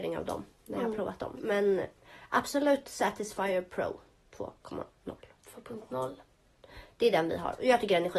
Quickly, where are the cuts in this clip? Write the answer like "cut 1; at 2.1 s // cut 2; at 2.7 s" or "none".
none